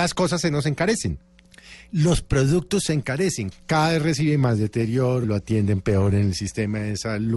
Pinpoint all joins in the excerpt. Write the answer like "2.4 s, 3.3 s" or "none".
3.5 s, 5.2 s